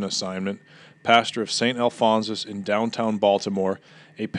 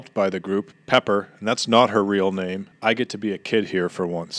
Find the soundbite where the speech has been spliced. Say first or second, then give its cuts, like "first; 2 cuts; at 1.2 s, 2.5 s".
second; 1 cut; at 2.7 s